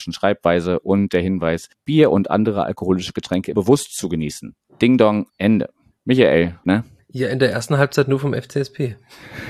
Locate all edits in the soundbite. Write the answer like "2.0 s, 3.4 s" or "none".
5.3 s, 6.6 s